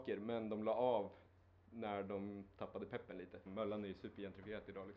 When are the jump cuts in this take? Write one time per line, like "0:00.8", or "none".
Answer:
0:03.5